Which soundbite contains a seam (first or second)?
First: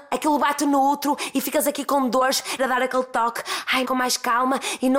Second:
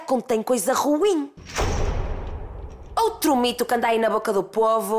first